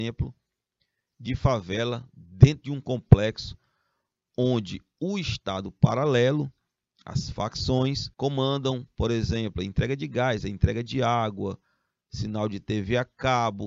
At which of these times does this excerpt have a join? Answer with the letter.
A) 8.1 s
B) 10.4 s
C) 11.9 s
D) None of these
A